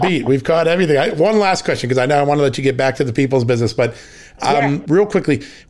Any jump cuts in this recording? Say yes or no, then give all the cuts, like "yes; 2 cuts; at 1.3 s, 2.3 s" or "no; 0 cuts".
no; 0 cuts